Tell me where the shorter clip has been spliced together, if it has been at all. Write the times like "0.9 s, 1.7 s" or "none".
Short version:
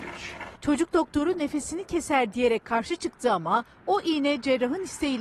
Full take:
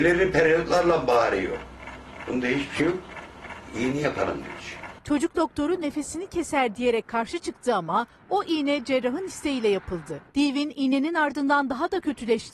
none